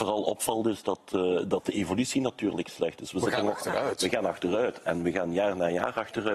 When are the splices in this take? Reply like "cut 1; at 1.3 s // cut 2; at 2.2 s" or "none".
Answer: none

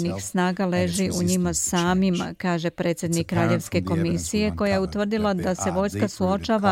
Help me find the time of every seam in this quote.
none

